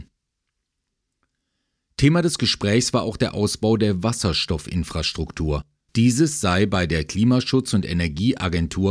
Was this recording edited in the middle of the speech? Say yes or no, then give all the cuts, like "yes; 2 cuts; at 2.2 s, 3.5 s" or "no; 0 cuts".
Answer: yes; 1 cut; at 5.9 s